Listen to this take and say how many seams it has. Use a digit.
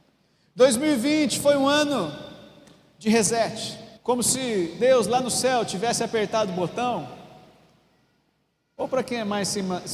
1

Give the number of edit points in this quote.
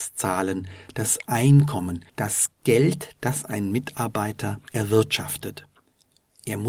2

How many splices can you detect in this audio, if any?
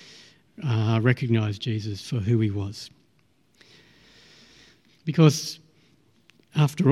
1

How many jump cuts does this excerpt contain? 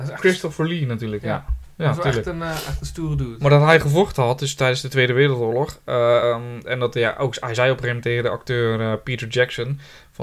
0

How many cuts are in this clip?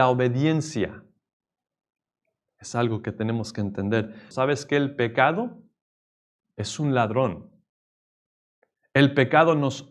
1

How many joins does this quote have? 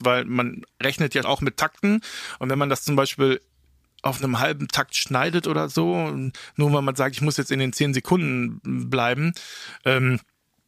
1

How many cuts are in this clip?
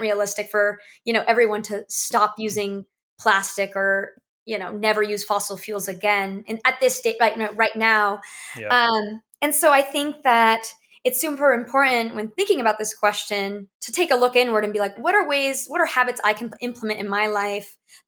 2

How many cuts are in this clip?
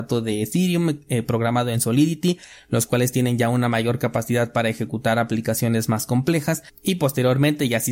1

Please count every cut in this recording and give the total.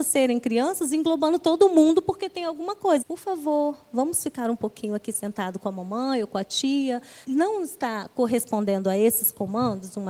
2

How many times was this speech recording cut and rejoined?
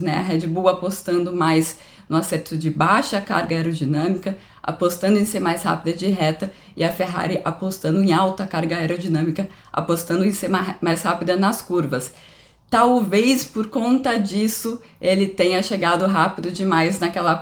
0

